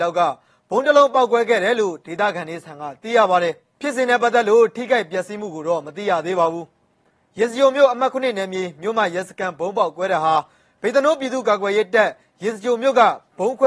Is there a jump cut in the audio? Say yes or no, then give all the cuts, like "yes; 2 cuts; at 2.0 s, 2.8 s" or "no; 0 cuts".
no; 0 cuts